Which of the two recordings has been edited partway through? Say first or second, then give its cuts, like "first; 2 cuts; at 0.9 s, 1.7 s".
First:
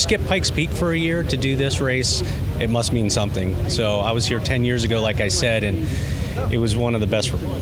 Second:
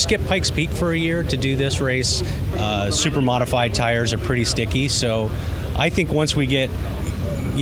second; 1 cut; at 2.5 s